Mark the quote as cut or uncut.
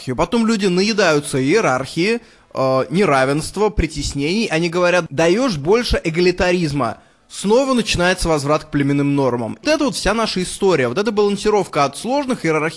cut